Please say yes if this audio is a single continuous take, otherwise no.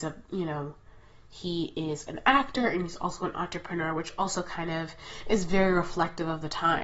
yes